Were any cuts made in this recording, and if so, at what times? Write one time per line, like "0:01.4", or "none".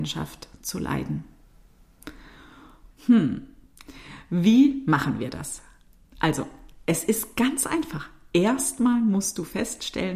0:02.9